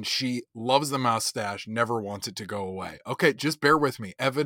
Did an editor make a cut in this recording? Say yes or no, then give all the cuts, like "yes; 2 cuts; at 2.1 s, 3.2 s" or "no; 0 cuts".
no; 0 cuts